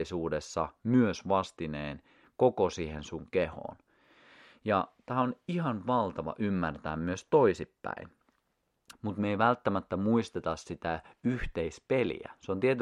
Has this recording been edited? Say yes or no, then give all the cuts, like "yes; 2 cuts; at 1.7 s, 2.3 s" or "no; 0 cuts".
yes; 1 cut; at 8.9 s